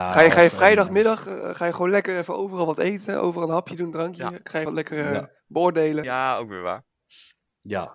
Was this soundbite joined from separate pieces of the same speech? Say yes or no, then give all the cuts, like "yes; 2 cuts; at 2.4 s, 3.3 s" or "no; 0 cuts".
yes; 2 cuts; at 4.7 s, 6.0 s